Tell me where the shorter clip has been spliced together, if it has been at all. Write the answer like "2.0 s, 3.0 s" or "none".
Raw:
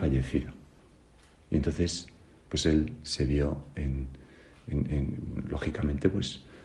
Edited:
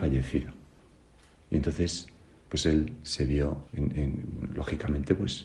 3.7 s

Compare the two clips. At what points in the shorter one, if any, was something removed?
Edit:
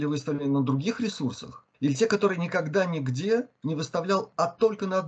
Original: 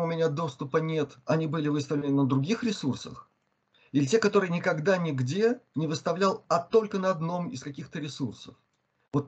1.7 s

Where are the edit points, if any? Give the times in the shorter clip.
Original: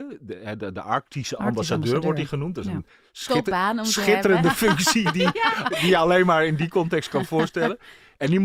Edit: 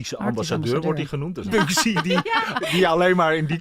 1.5 s

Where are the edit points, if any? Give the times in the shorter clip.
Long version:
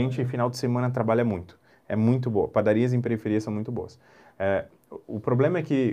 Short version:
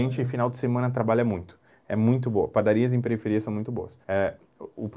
4.0 s

